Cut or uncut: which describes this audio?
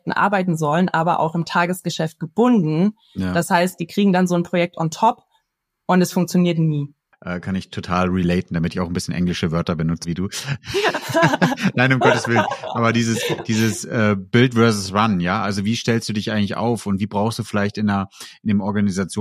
cut